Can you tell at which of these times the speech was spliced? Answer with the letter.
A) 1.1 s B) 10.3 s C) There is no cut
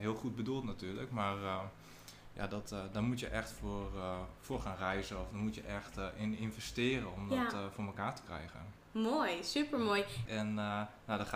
B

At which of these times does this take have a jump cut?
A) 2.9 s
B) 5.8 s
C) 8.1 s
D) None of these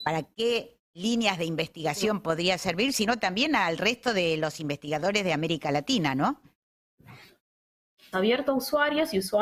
C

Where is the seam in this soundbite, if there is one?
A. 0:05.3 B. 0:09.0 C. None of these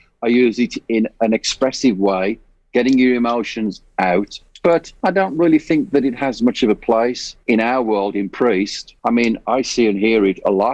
B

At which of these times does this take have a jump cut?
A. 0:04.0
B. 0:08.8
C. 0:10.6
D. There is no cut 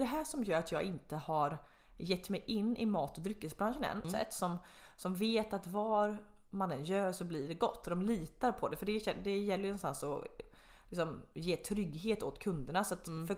A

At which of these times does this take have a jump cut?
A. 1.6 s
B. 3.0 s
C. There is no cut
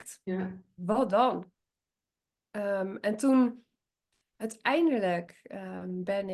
C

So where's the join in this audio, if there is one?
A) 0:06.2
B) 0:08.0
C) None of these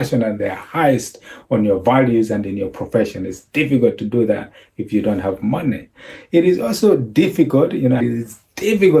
B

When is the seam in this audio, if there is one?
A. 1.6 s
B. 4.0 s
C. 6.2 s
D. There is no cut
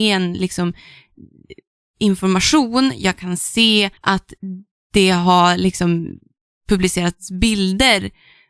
B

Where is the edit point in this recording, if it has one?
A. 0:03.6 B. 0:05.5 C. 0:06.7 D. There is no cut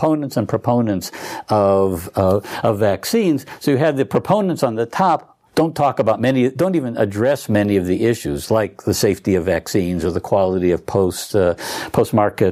B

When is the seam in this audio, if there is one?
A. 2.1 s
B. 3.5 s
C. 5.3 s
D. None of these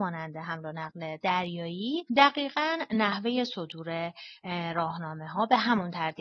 A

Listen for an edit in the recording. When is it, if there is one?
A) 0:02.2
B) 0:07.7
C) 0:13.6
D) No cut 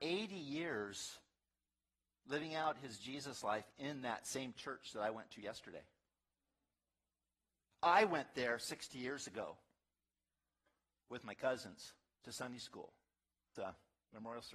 C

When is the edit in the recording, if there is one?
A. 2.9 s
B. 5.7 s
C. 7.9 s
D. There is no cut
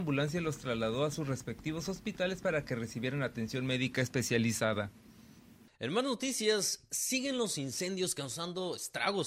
B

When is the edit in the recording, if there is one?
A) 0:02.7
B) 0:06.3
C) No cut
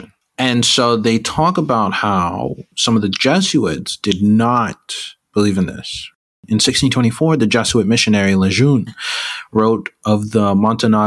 A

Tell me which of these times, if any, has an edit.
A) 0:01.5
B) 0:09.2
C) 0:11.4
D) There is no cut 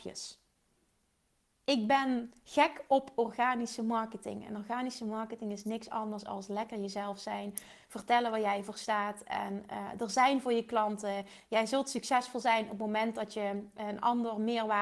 C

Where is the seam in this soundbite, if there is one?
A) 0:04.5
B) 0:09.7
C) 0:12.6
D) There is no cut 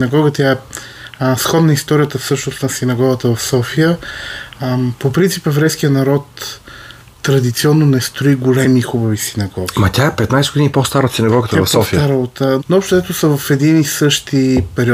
C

